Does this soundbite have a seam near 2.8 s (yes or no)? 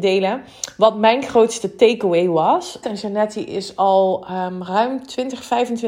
yes